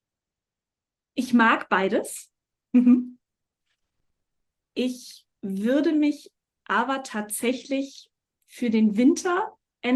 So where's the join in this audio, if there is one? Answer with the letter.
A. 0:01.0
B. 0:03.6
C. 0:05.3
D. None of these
C